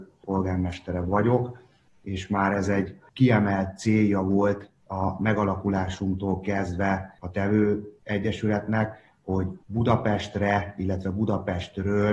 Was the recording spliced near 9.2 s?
no; 1 cut; at 4.8 s

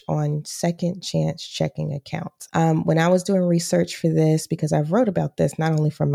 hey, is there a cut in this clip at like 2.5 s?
yes; 1 cut; at 2.5 s

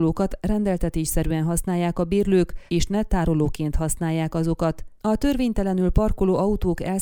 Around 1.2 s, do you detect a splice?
no; 2 cuts; at 2.7 s, 4.9 s

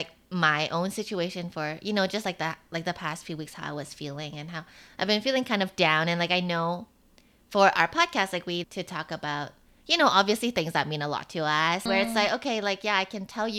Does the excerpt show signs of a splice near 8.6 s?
yes; 2 cuts; at 8.6 s, 11.9 s

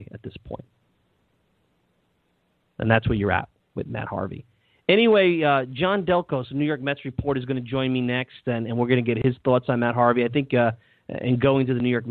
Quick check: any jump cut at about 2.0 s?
no; 0 cuts

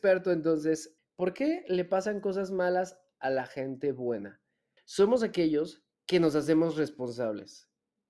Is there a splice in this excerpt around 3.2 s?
no; 2 cuts; at 1.0 s, 4.8 s

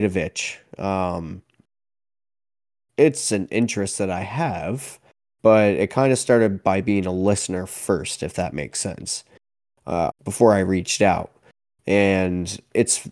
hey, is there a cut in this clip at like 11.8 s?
no; 1 cut; at 10.1 s

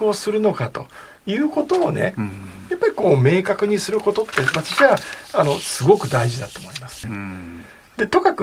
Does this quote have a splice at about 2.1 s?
no; 1 cut; at 7.0 s

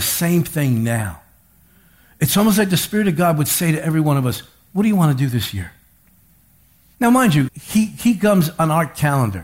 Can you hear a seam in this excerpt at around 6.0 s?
no; 1 cut; at 7.5 s

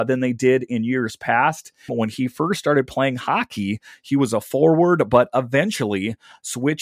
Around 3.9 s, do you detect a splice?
no; 1 cut; at 1.9 s

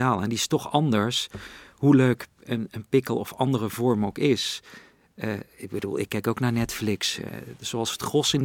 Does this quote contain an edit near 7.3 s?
yes; 1 cut; at 7.3 s

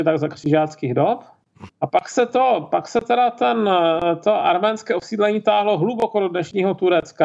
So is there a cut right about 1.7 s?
yes; 1 cut; at 1.7 s

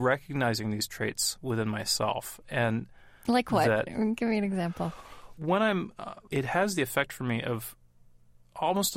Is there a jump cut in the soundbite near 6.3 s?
yes; 1 cut; at 6.3 s

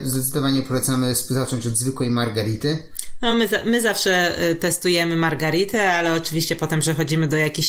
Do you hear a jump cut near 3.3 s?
no; 0 cuts

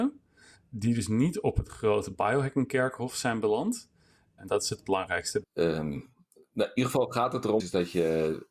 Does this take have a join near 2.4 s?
no; 3 cuts; at 4.4 s, 5.4 s, 7.6 s

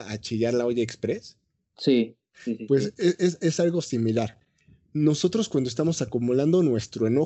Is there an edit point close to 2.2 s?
no; 0 cuts

